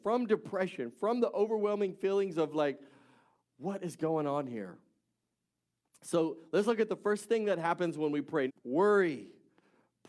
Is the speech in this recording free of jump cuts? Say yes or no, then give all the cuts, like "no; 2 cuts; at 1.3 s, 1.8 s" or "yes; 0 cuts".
no; 1 cut; at 8.5 s